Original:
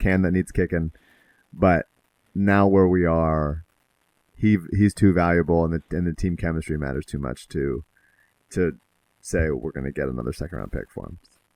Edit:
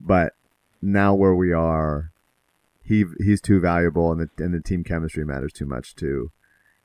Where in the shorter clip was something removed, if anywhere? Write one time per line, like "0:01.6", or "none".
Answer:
none